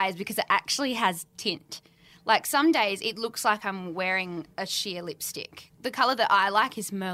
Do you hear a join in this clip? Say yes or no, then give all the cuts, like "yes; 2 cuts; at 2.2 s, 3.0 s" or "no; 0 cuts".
no; 0 cuts